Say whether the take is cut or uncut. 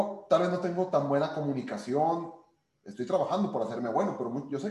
cut